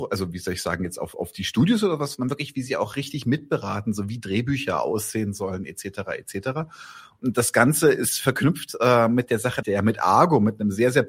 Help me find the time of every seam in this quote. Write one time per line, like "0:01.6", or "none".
0:09.6